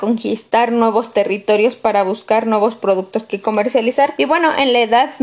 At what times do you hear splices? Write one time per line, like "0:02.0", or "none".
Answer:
0:04.2